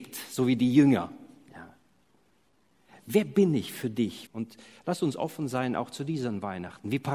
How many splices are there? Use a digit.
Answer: 1